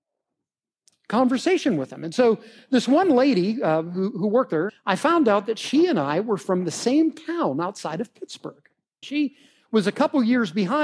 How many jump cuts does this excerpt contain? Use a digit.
2